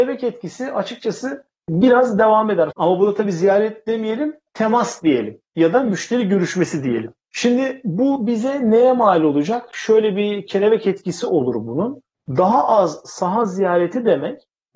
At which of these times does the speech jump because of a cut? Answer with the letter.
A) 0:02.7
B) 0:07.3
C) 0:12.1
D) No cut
A